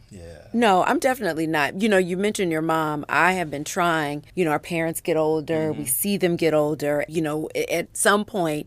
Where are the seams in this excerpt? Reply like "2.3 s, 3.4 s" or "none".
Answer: 4.3 s, 7.1 s